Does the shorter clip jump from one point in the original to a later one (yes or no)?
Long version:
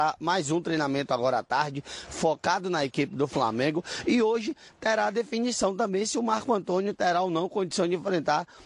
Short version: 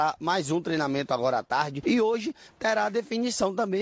yes